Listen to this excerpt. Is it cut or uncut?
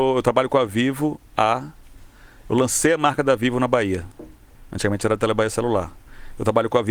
uncut